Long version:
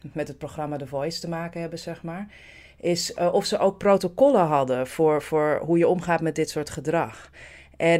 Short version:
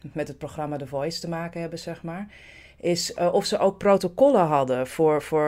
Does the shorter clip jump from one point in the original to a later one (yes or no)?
no